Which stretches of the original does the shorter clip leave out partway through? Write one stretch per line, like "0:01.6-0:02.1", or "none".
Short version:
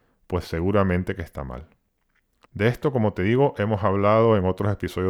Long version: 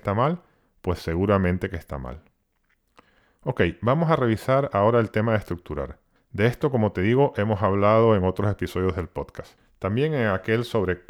0:03.0-0:06.2

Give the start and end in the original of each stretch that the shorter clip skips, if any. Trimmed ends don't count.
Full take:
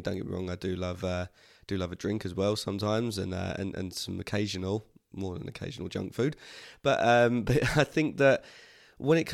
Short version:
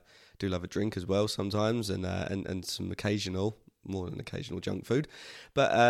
none

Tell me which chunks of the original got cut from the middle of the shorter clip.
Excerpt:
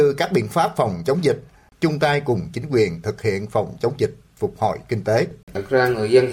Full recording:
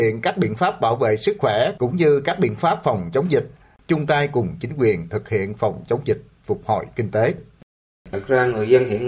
0:07.5-0:08.0

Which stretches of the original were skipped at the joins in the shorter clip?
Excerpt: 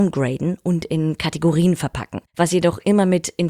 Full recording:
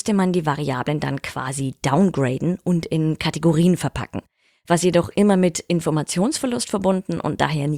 0:04.3-0:04.6

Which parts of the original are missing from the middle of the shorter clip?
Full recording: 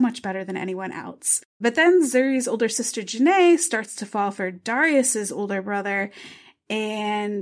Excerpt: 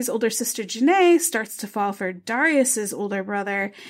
none

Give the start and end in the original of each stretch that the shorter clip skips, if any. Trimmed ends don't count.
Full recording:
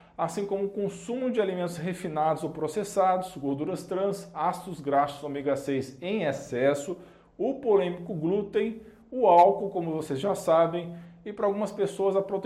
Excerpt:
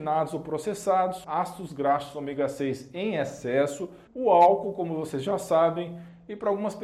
0:03.3-0:04.3
0:07.1-0:09.0

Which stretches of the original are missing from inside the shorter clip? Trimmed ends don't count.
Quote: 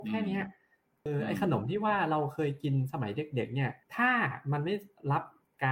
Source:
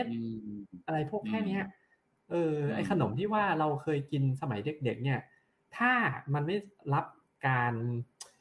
0:02.3-0:02.5
0:05.3-0:05.6

